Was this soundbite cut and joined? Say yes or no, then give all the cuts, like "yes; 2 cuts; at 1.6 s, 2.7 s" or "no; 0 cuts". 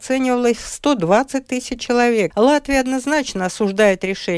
yes; 1 cut; at 2.3 s